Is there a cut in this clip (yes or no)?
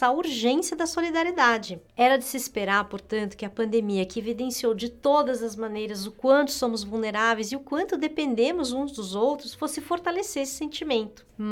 no